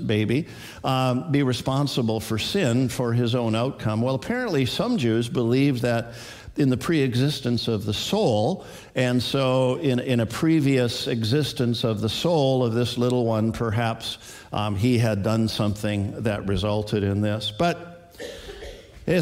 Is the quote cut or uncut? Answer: uncut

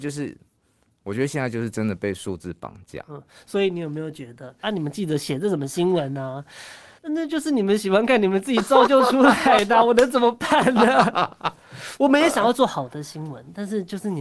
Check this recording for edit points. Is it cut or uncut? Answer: cut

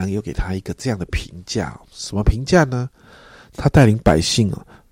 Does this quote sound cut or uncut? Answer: cut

